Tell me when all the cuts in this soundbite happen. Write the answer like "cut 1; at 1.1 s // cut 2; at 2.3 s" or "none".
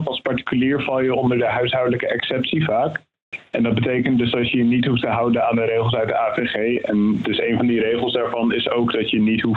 none